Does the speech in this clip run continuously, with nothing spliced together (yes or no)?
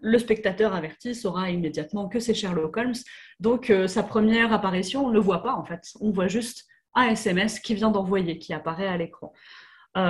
yes